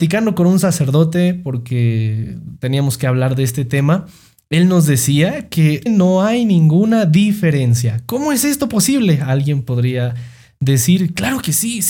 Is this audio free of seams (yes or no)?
no